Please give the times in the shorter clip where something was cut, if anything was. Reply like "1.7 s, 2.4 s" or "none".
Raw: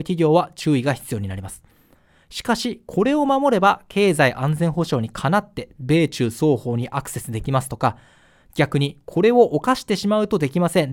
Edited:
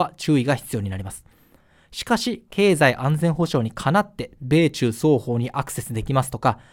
2.5 s